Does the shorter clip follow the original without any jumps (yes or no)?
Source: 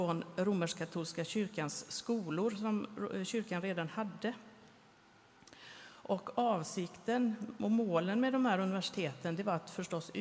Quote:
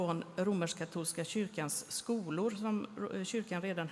yes